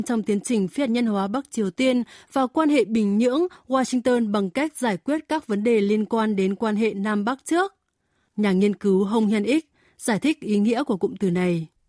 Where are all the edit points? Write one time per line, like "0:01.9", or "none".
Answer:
0:08.3

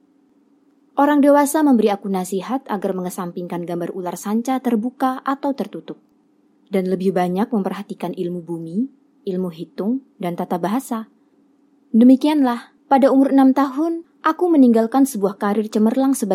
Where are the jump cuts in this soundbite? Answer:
0:09.2

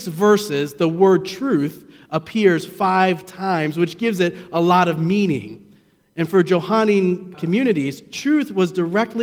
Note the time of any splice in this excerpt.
0:07.3

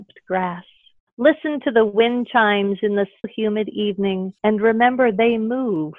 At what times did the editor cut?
0:03.2
0:04.4

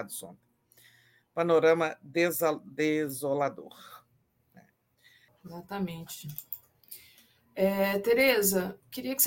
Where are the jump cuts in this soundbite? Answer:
0:05.3

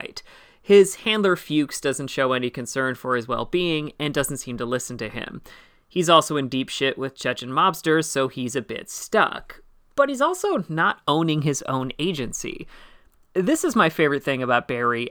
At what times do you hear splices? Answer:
none

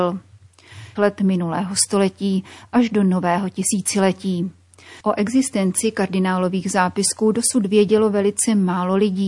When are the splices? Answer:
0:01.0

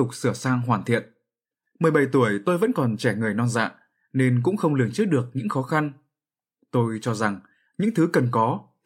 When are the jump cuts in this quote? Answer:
0:01.7

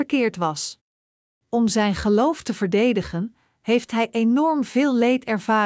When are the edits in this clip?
0:01.4

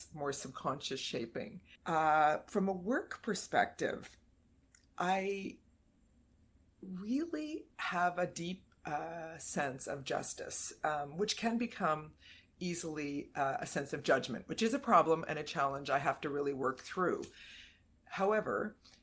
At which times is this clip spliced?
0:01.8

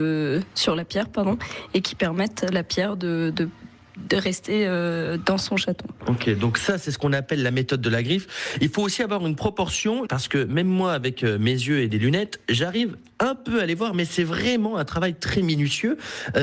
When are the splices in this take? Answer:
0:10.1

